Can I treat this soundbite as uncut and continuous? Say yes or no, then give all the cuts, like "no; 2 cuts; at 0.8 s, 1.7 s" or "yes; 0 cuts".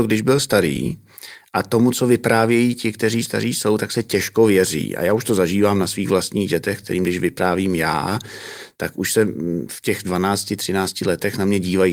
yes; 0 cuts